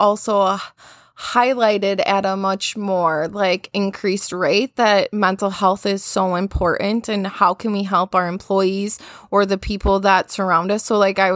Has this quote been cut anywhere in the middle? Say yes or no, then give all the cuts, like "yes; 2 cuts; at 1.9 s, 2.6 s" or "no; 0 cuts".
no; 0 cuts